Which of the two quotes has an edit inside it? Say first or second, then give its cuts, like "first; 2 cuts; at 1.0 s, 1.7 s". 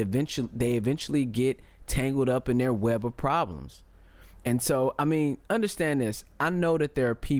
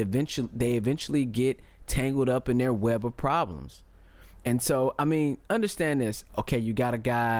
second; 1 cut; at 6.3 s